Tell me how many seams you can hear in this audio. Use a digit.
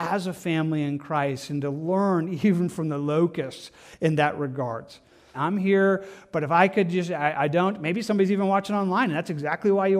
1